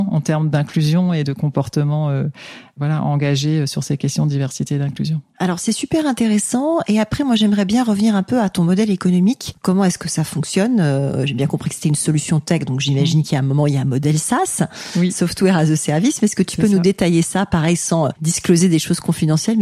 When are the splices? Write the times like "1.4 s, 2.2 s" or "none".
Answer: none